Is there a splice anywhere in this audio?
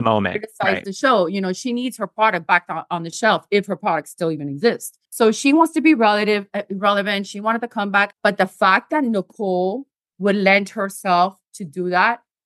yes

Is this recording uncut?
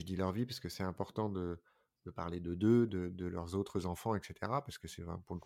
no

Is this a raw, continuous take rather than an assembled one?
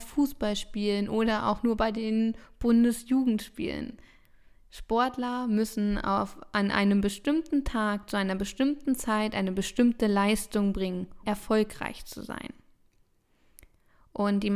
no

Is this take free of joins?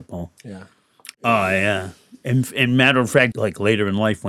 no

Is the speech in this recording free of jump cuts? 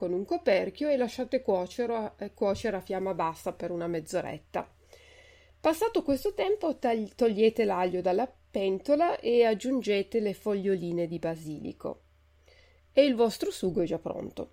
yes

